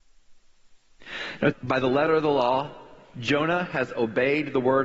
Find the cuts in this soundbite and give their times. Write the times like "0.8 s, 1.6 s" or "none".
1.5 s

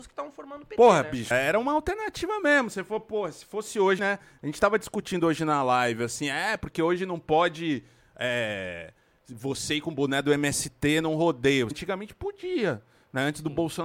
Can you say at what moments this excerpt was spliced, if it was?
1.3 s, 4.0 s, 11.7 s

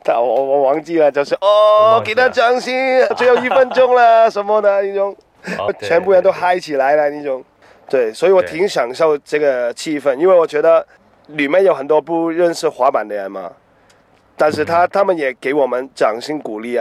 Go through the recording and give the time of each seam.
3.1 s, 5.7 s

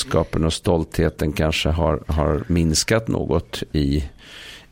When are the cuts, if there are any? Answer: 2.0 s

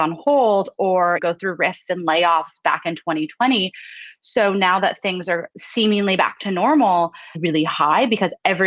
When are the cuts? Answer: 7.3 s

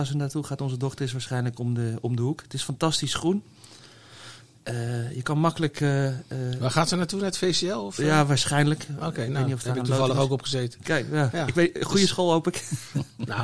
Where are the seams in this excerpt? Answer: none

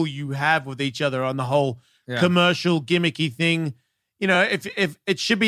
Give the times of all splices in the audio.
none

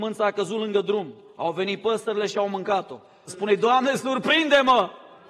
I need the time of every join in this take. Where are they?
3.3 s

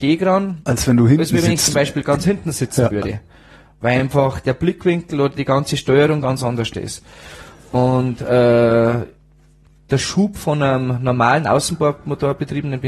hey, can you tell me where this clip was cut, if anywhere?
none

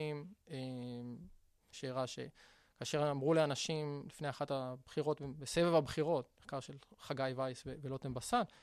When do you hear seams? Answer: 1.7 s

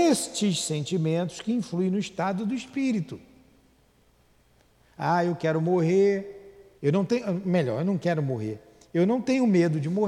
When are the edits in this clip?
6.8 s

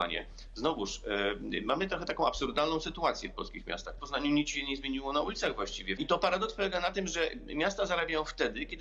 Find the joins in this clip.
4.0 s, 6.0 s

